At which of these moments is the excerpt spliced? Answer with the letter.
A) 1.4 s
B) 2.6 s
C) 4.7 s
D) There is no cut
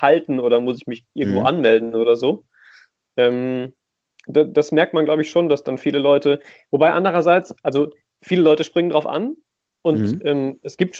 D